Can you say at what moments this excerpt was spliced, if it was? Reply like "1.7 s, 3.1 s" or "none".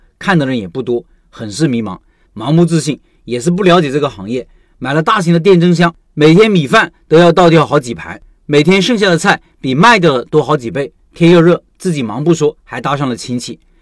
2.3 s